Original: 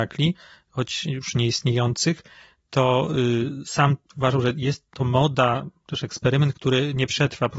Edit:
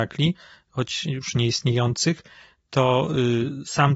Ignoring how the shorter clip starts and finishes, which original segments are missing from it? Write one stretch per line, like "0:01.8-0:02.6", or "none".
none